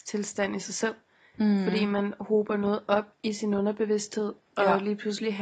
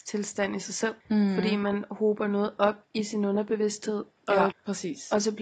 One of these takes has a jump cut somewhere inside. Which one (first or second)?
second